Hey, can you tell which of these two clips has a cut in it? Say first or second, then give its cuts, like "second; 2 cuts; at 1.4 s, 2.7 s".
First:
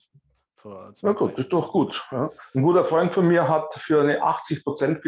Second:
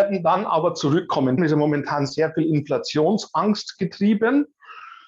second; 1 cut; at 1.4 s